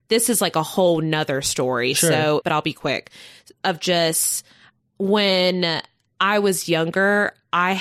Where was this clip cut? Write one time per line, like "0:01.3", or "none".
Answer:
0:02.4